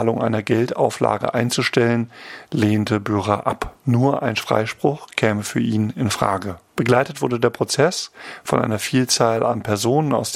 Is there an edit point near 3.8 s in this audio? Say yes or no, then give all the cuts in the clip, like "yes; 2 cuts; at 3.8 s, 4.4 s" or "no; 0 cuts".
yes; 2 cuts; at 3.8 s, 6.7 s